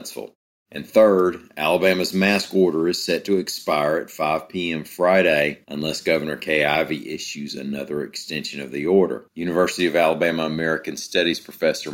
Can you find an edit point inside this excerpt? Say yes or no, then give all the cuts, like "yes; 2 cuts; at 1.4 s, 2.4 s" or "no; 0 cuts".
yes; 1 cut; at 9.3 s